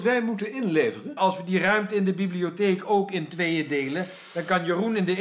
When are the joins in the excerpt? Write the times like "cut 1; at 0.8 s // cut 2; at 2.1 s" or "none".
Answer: cut 1; at 1.2 s